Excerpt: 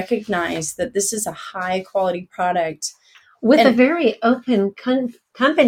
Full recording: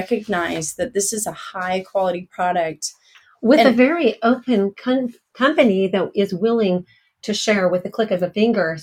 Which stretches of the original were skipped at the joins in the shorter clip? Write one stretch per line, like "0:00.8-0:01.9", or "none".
none